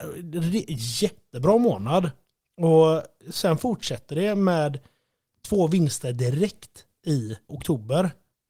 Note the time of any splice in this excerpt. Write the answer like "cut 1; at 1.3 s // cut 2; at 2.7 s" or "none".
cut 1; at 7.5 s